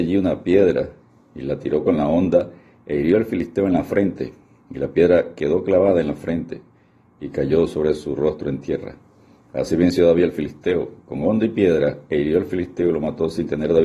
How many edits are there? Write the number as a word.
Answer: zero